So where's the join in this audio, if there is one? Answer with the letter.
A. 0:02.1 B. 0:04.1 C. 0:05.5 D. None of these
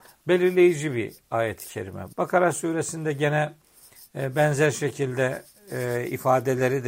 A